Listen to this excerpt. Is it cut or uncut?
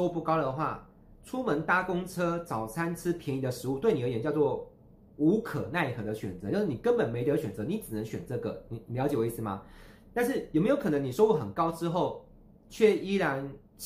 uncut